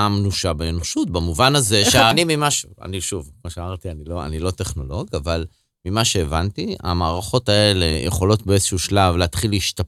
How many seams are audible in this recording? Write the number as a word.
one